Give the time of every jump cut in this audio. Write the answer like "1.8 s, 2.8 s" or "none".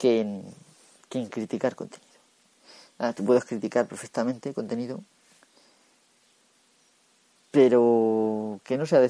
none